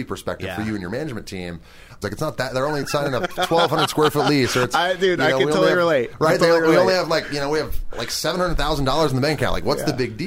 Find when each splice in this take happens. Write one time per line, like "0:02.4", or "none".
0:02.0